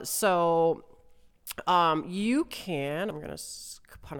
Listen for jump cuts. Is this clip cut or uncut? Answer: uncut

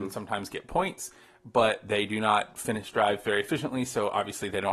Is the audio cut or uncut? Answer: uncut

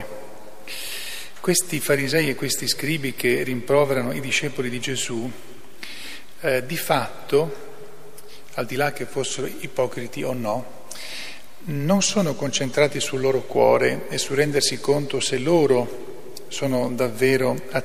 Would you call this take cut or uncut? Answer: uncut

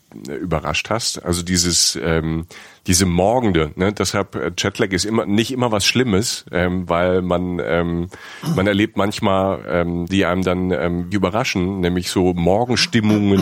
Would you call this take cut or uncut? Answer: cut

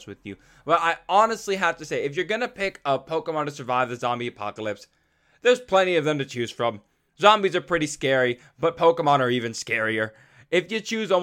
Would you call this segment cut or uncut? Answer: uncut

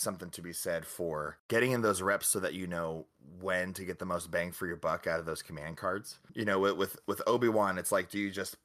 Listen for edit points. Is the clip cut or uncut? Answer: uncut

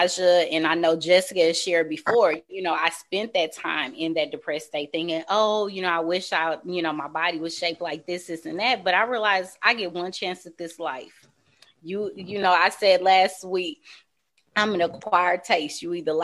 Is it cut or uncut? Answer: uncut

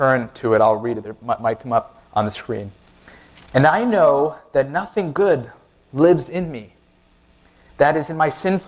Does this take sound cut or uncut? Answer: uncut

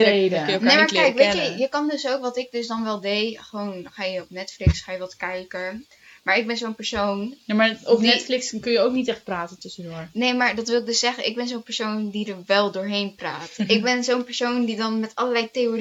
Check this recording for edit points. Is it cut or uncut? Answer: uncut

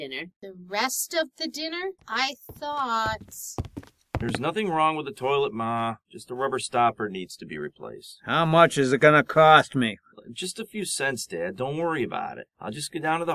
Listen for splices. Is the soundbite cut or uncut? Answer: cut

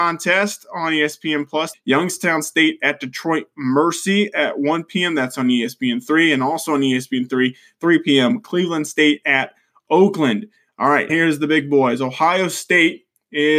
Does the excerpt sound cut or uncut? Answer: cut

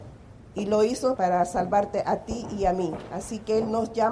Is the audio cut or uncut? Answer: cut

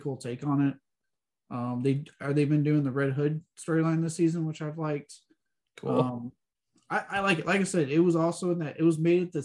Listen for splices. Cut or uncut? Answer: uncut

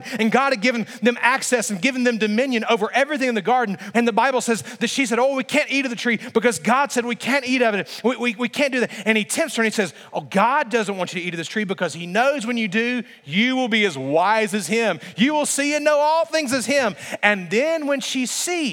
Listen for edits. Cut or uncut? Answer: cut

